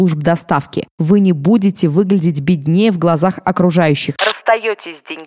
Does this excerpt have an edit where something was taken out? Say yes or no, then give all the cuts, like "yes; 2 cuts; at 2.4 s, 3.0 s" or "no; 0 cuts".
yes; 1 cut; at 4.2 s